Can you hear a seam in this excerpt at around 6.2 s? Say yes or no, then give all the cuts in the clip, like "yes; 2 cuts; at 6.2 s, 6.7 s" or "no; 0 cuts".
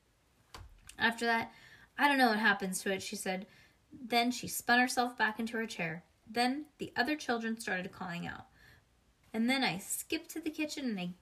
yes; 2 cuts; at 6.2 s, 9.2 s